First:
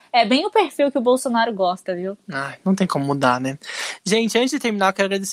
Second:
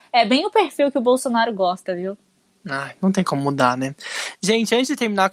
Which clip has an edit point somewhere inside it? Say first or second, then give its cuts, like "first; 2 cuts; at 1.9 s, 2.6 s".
first; 1 cut; at 2.2 s